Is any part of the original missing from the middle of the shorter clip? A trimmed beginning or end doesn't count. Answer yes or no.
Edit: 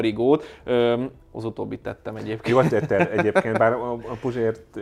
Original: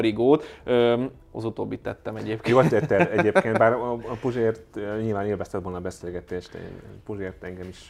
no